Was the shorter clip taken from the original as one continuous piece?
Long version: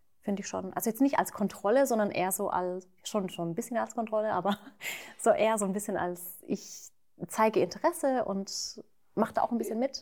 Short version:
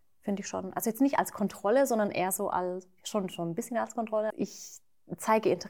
no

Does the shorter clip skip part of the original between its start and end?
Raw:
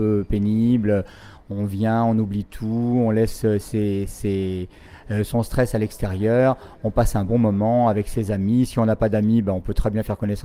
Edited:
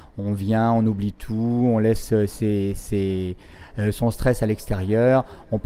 no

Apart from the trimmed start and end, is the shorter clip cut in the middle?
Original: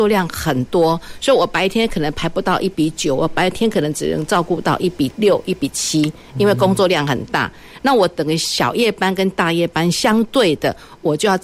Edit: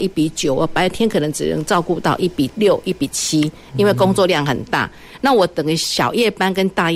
no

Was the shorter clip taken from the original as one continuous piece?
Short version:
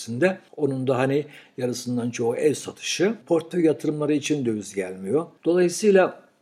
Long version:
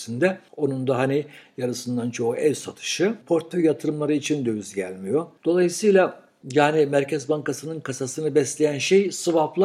yes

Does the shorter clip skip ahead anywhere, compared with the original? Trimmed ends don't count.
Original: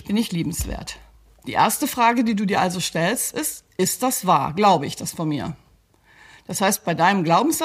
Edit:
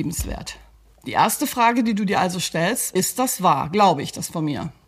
yes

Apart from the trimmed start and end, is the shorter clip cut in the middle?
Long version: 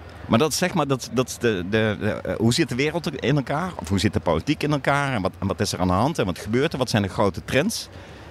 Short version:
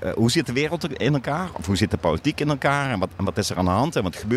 no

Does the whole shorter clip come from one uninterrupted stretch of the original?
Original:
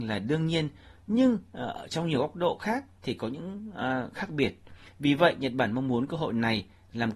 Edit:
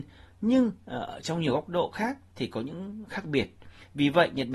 no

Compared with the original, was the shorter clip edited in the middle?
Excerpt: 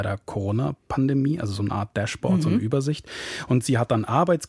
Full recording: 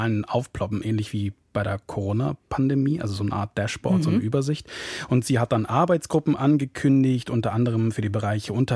no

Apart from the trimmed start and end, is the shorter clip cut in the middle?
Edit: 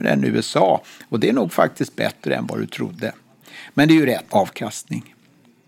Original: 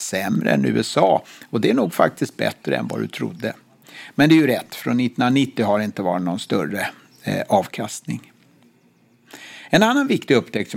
yes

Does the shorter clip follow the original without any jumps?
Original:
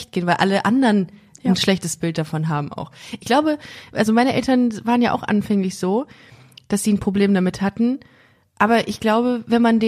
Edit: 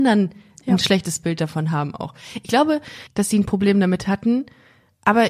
no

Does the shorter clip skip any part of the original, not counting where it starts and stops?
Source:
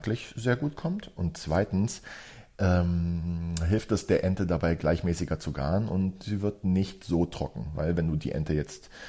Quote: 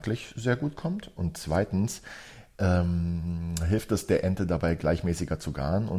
no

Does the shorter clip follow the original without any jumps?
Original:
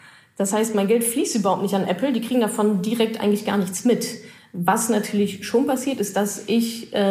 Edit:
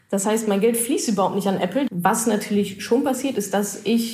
no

